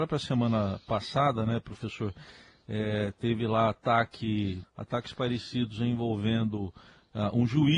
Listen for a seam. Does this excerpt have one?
yes; 1 cut; at 4.6 s

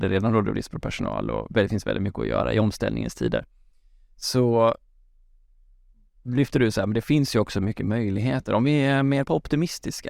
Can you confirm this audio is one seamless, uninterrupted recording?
yes; 0 cuts

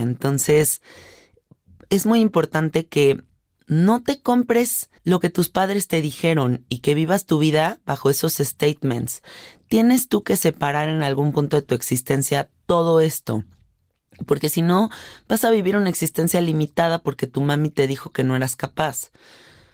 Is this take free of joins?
no; 1 cut; at 5.0 s

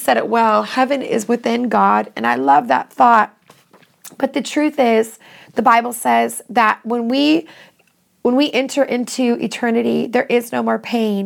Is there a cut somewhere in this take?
no; 0 cuts

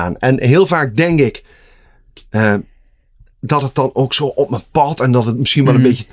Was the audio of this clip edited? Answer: no; 0 cuts

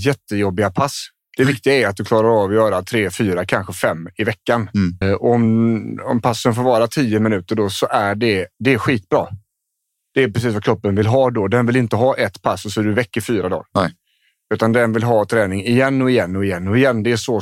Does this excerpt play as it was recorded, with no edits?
no; 2 cuts; at 5.0 s, 8.5 s

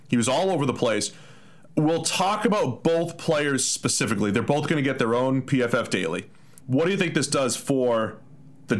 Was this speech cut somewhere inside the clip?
yes; 1 cut; at 6.6 s

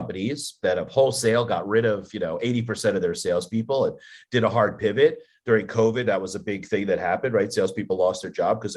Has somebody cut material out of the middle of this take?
no; 0 cuts

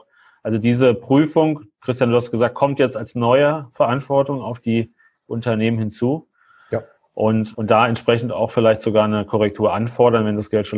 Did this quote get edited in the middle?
yes; 1 cut; at 7.5 s

